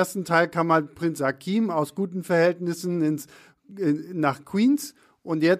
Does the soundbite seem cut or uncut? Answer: uncut